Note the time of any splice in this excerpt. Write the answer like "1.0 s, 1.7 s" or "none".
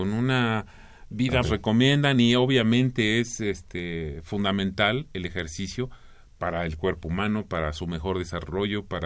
1.4 s